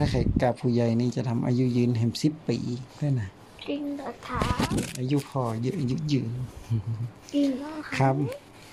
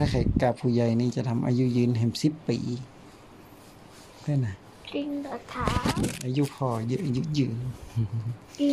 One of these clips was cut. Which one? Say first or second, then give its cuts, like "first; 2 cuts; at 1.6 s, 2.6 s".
first; 1 cut; at 2.9 s